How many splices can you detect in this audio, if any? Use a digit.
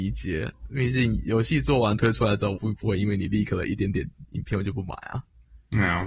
1